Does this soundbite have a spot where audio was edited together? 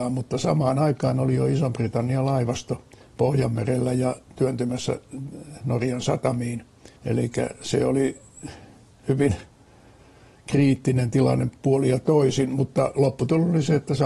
yes; 1 cut; at 7.0 s

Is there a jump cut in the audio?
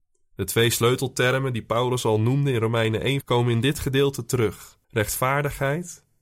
yes; 2 cuts; at 3.2 s, 4.8 s

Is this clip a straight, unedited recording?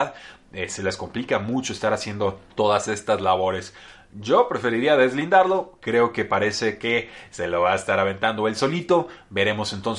no; 1 cut; at 2.5 s

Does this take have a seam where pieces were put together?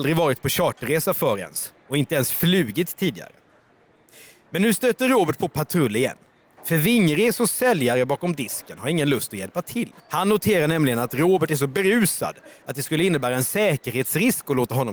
yes; 1 cut; at 10.0 s

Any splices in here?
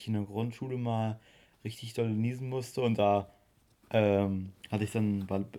no; 0 cuts

